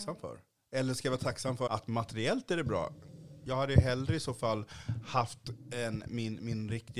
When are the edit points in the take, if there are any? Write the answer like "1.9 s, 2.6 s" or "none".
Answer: 1.7 s, 6.0 s